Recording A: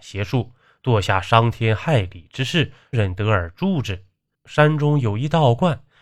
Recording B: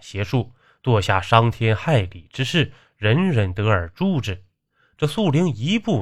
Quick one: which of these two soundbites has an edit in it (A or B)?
A